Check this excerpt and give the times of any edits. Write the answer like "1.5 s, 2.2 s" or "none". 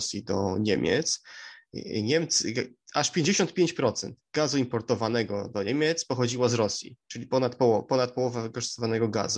none